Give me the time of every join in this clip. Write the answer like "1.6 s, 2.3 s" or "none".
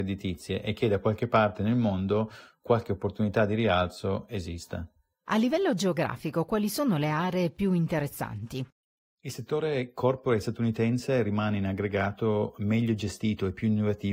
none